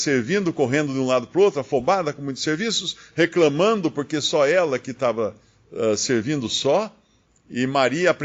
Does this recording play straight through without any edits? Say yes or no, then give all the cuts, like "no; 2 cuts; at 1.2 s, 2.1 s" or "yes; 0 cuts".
yes; 0 cuts